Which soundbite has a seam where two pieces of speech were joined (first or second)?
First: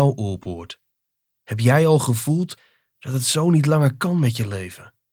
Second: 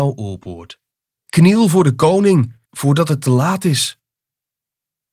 second